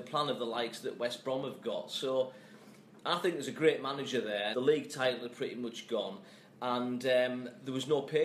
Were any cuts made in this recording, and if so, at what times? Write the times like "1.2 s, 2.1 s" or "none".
4.5 s